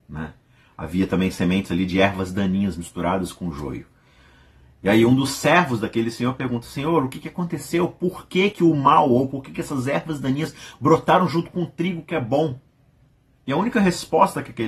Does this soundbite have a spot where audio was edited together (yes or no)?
no